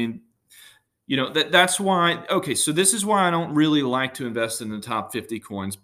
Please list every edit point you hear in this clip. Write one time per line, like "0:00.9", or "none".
none